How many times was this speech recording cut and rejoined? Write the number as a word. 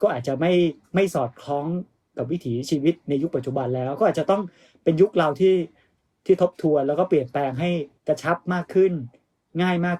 one